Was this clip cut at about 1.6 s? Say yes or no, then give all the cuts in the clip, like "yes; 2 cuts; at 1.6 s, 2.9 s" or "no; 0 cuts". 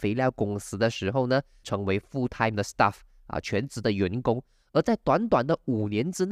yes; 1 cut; at 1.6 s